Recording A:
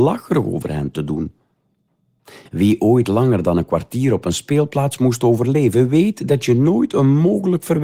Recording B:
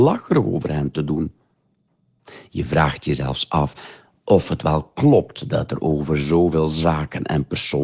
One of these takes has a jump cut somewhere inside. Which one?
A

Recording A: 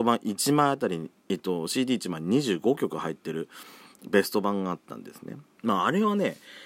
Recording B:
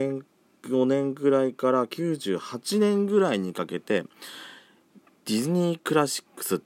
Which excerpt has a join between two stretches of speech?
A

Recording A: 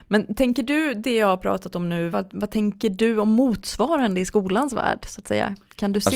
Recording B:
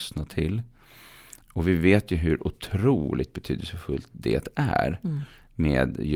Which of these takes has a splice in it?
A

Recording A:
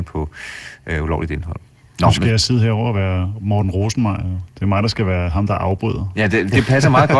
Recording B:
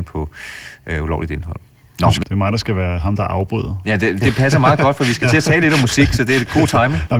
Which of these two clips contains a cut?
B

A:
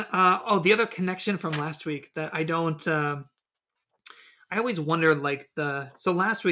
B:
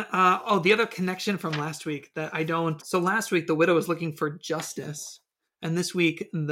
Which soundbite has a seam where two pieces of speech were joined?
B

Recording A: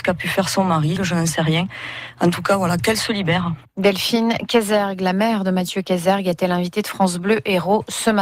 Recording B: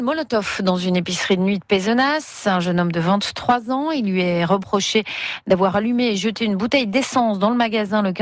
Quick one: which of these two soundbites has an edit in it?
A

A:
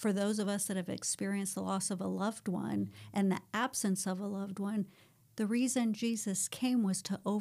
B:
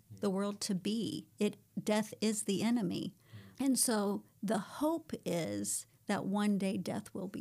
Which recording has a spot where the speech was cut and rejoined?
B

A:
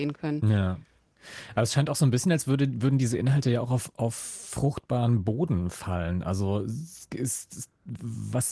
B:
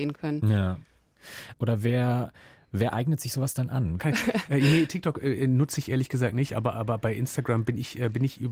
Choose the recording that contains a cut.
B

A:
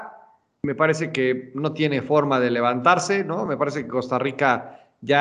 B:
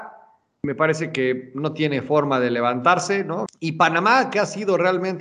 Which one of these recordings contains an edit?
B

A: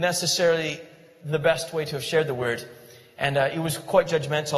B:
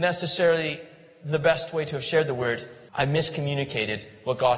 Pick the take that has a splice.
B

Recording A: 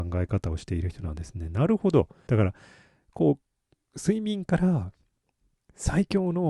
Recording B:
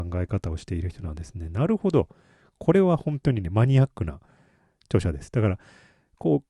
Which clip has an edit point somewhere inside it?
A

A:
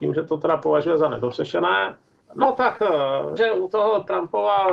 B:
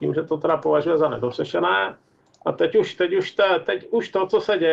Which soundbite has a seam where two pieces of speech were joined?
A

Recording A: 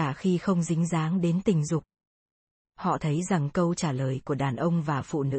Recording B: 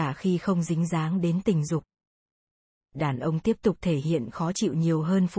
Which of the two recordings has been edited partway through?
A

